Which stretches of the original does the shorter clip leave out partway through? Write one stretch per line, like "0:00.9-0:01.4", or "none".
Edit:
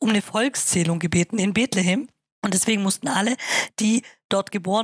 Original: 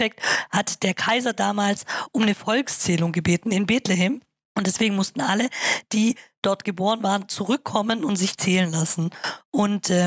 none